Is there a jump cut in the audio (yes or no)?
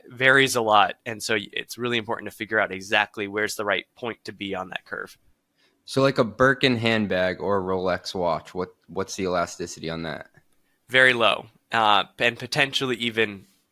no